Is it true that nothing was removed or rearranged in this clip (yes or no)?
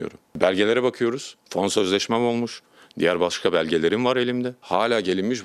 no